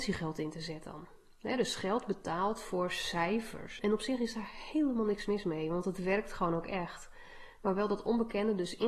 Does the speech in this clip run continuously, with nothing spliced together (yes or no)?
no